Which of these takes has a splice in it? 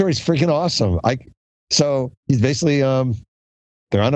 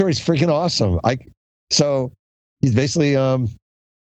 first; 1 cut; at 2.2 s

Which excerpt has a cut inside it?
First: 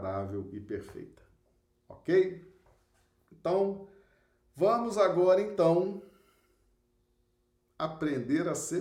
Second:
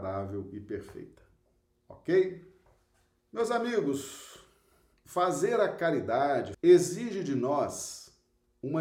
second; 2 cuts; at 3.2 s, 6.5 s

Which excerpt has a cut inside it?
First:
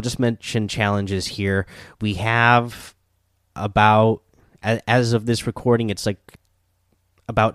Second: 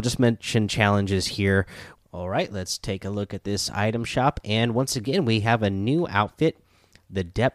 second; 1 cut; at 1.9 s

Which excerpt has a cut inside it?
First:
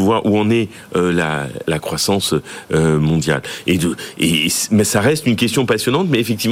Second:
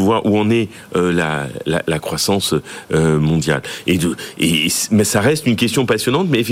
first; 1 cut; at 1.6 s

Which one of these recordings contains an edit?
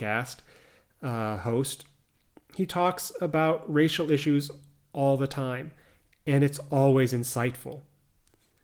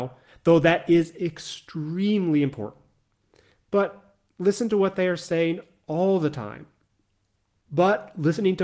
second; 1 cut; at 7.5 s

